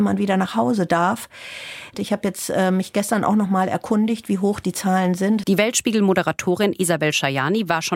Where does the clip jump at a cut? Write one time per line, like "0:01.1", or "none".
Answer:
0:01.9
0:05.4